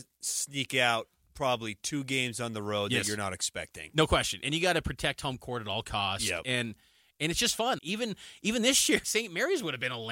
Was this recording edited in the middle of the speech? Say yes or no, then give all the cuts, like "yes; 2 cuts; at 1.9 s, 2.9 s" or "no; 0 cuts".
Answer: yes; 2 cuts; at 7.8 s, 9.0 s